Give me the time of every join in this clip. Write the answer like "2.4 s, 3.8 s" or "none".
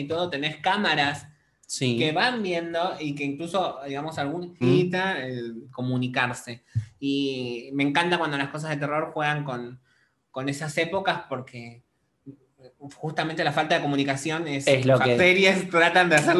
4.6 s, 5.6 s, 15.2 s